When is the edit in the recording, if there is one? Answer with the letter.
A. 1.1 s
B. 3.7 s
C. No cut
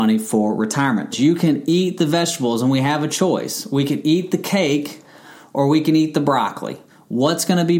A